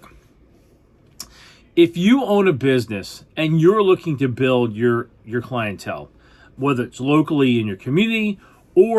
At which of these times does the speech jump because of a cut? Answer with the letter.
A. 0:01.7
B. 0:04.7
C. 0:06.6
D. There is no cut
C